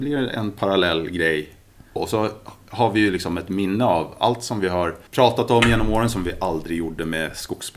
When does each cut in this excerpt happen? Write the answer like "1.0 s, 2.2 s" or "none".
2.0 s, 5.1 s